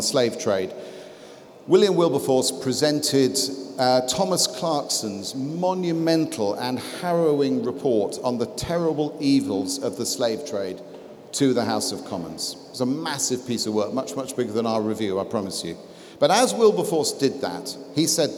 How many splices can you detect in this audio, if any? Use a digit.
0